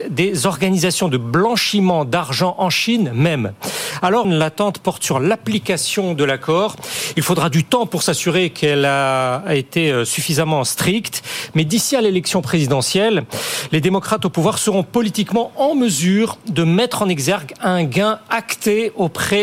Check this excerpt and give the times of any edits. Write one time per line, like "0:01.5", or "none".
0:04.2